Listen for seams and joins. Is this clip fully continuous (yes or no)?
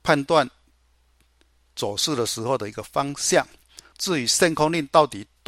no